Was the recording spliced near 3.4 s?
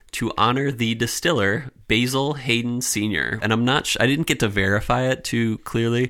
yes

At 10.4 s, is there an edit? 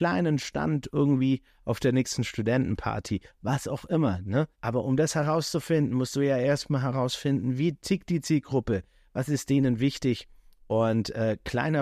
no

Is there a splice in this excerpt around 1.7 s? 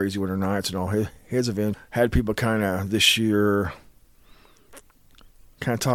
yes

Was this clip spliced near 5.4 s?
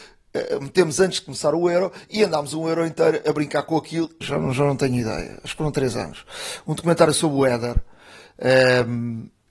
no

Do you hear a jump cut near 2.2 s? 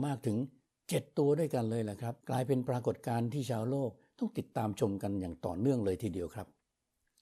yes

